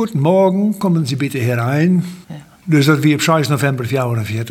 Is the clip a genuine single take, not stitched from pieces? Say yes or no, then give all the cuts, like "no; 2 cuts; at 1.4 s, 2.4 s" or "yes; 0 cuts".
no; 1 cut; at 2.2 s